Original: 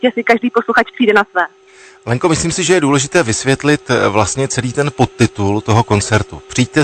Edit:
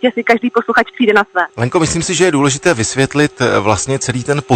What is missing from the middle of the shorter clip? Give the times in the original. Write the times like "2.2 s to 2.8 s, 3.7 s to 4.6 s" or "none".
1.5 s to 2.0 s